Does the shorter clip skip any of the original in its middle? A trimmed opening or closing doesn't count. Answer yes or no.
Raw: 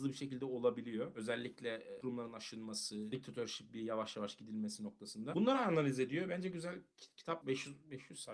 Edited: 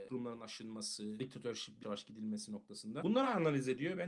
yes